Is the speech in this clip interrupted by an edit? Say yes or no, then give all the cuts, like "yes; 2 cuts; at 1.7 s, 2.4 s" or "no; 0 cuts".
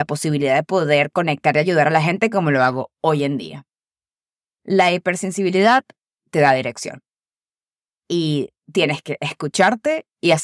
no; 0 cuts